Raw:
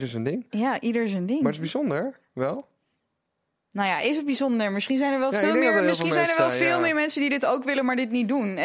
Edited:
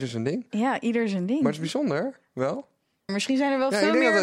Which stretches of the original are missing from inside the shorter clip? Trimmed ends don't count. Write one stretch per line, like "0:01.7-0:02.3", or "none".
0:03.1-0:04.7